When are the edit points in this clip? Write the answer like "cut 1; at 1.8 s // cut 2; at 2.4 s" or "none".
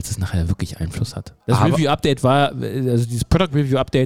cut 1; at 1.4 s